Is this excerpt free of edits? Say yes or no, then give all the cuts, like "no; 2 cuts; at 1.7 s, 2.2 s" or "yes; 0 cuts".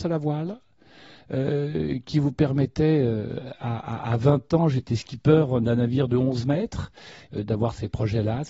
no; 1 cut; at 7.3 s